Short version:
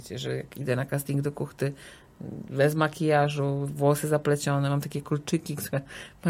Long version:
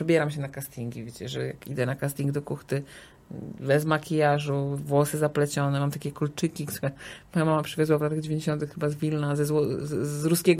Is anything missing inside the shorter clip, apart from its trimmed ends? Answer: no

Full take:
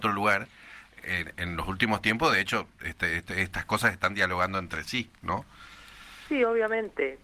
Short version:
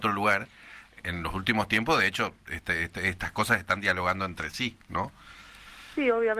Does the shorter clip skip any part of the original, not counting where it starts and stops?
yes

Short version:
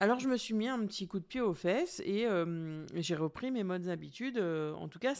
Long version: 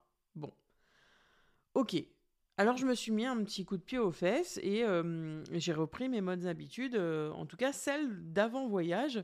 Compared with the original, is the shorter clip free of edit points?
yes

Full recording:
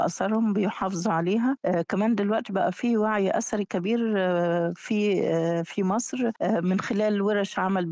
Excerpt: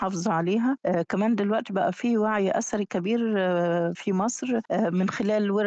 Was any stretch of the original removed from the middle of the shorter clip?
yes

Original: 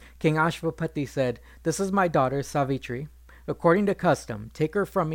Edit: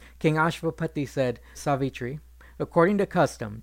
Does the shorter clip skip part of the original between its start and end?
yes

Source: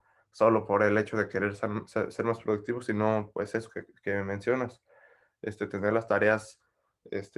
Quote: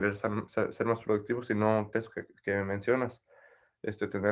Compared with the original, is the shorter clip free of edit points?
no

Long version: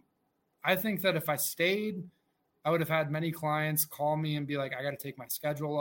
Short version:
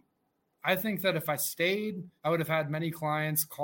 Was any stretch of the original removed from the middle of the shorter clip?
yes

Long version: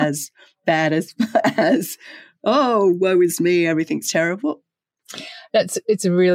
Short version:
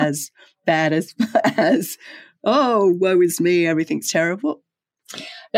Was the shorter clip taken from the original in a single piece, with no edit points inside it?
yes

